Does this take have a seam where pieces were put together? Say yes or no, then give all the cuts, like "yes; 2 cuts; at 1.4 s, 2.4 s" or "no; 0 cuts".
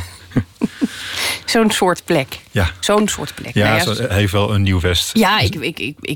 yes; 2 cuts; at 4.1 s, 5.1 s